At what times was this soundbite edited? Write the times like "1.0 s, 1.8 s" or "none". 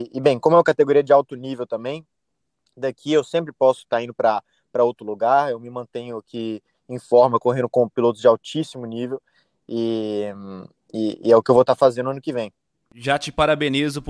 none